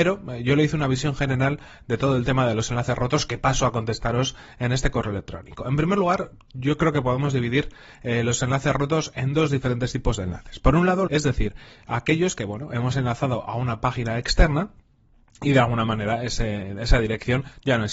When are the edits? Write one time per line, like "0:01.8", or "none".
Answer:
0:11.1